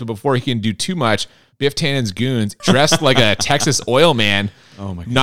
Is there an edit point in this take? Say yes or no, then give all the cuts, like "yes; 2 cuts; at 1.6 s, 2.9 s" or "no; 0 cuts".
yes; 1 cut; at 2.6 s